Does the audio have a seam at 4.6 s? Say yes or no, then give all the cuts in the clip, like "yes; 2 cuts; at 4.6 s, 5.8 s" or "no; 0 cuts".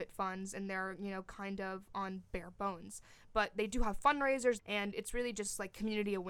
yes; 1 cut; at 4.6 s